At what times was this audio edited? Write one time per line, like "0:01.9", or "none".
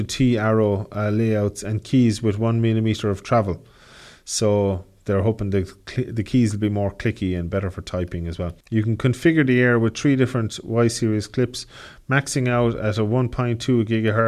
0:08.6